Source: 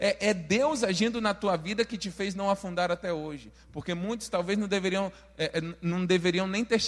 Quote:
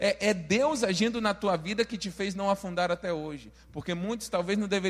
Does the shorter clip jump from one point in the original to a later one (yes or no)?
no